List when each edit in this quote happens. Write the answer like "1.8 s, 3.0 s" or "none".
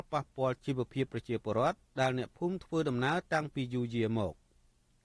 none